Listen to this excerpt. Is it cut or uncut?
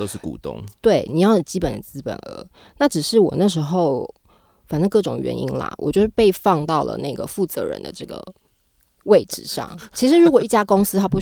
uncut